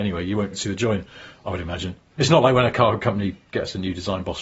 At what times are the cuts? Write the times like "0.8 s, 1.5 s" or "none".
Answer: none